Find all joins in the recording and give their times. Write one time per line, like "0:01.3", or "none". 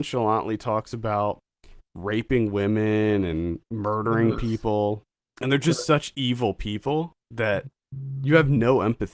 none